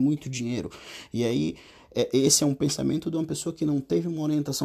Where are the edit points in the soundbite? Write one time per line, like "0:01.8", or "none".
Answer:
none